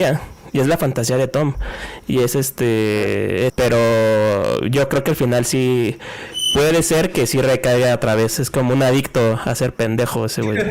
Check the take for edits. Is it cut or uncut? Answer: cut